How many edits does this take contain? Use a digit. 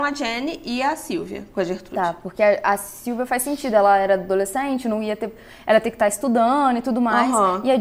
0